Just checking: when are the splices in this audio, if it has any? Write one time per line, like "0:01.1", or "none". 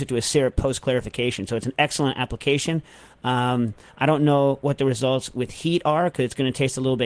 none